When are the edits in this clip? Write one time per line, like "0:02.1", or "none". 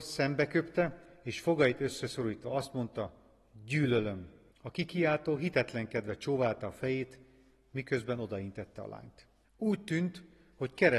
0:04.5
0:09.4